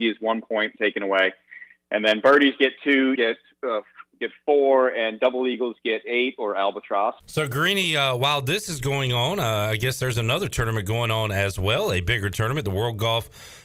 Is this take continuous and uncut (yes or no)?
no